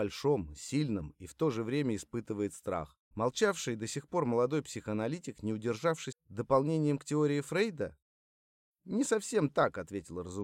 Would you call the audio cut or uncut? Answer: cut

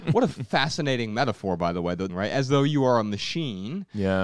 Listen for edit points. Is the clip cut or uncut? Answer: cut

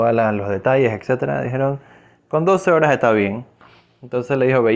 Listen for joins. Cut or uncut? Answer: uncut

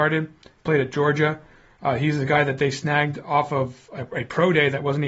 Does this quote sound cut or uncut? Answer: uncut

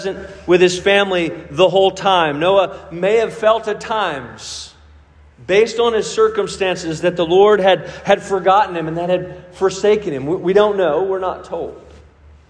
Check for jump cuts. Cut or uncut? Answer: uncut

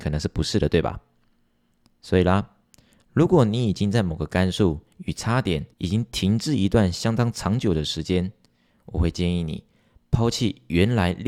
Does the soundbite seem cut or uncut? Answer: cut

